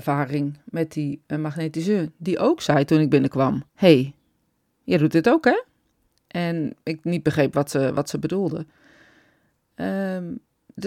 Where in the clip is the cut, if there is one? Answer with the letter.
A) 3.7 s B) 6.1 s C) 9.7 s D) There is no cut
A